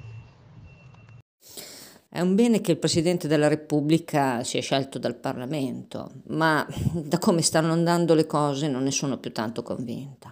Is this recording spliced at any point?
yes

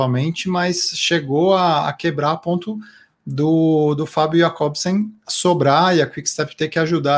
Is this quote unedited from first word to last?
yes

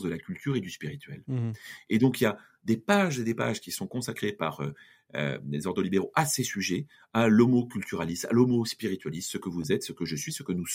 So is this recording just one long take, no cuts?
yes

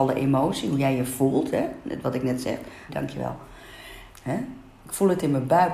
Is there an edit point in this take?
yes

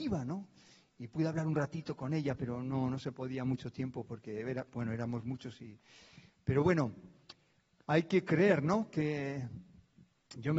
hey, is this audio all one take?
yes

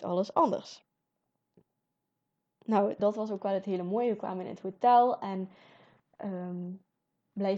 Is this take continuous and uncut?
no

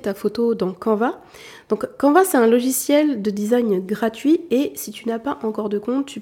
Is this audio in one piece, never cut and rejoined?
yes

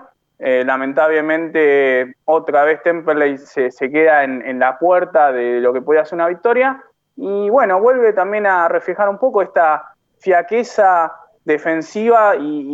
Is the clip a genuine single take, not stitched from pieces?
yes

